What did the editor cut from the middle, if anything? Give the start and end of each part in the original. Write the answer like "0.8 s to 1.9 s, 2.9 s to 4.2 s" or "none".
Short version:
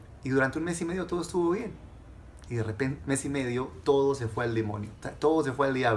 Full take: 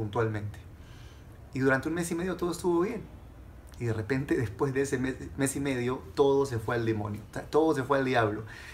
4.3 s to 5.3 s